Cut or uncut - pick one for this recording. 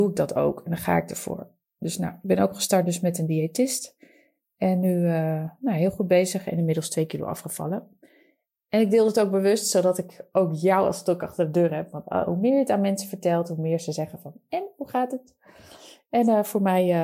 uncut